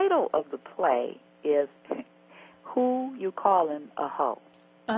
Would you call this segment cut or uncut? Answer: cut